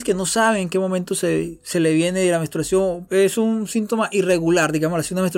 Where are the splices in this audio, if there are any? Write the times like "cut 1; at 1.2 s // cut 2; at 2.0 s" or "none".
cut 1; at 3.1 s